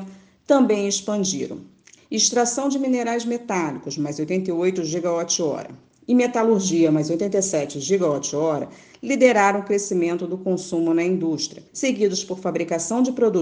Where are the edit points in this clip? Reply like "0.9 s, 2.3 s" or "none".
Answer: 2.0 s, 11.7 s

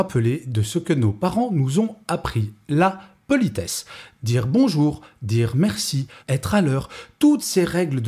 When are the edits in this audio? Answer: 6.2 s

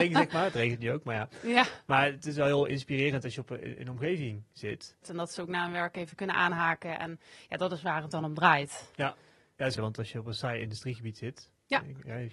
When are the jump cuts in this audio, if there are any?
5.0 s, 9.8 s

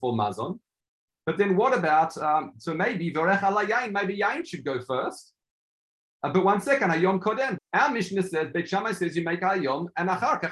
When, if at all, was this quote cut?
7.6 s

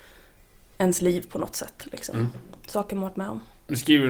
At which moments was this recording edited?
none

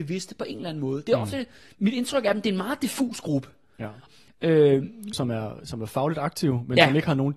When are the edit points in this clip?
4.1 s, 5.1 s

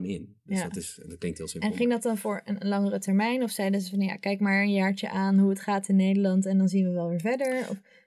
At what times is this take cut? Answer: none

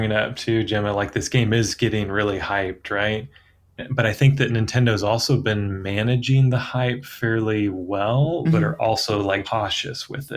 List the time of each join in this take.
3.8 s, 8.4 s, 9.4 s

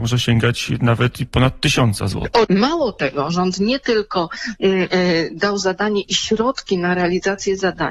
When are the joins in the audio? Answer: 2.4 s

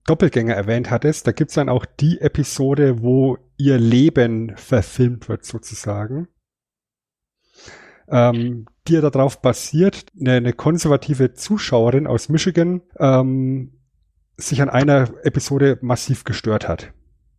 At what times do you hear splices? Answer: 10.0 s, 12.9 s

